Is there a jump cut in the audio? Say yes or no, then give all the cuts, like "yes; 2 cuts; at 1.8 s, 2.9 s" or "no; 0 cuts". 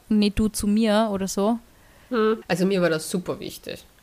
yes; 1 cut; at 2.4 s